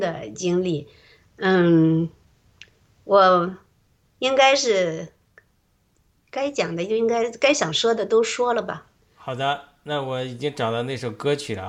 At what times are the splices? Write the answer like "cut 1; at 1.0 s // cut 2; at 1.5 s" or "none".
none